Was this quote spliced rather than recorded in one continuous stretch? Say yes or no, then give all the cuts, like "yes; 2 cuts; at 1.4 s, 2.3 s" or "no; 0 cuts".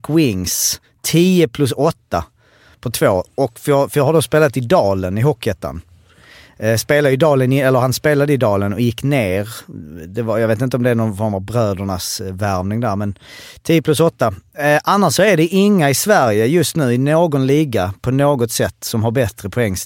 no; 0 cuts